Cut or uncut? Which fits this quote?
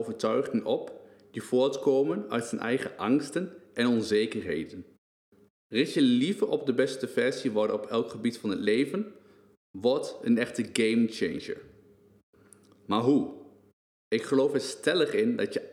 cut